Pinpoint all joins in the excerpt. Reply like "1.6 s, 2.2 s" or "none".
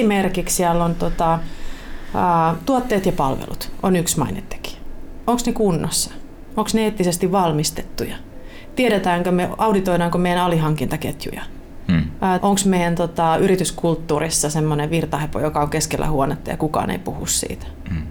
12.4 s